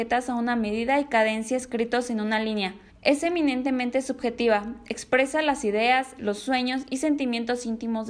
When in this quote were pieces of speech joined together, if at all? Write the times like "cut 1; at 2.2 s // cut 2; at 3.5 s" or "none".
cut 1; at 2.9 s // cut 2; at 6.2 s